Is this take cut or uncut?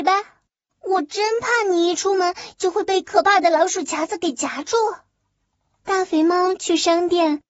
uncut